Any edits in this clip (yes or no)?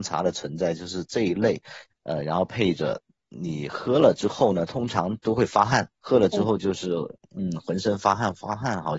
yes